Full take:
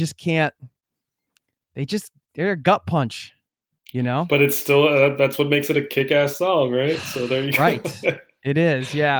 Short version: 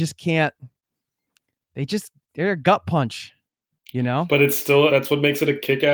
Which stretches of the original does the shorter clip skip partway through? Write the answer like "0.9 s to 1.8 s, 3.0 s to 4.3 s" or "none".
4.9 s to 5.2 s